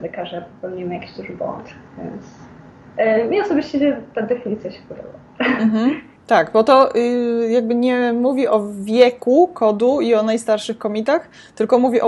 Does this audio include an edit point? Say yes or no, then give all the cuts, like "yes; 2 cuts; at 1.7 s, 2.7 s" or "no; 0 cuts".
no; 0 cuts